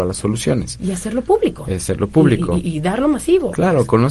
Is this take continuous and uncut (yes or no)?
yes